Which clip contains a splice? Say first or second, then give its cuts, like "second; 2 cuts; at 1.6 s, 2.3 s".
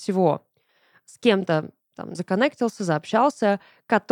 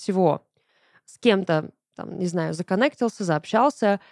first; 1 cut; at 2.1 s